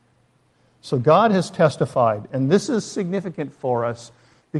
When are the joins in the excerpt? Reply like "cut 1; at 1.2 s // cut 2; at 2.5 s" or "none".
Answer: none